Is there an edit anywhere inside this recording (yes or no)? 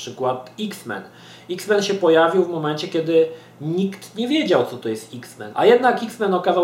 yes